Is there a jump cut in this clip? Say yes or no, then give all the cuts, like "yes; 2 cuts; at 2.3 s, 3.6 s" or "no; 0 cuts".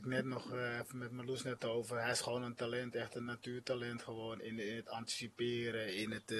no; 0 cuts